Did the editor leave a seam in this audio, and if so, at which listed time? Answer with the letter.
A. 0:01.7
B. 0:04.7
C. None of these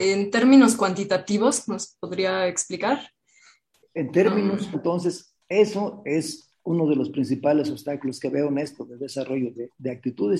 B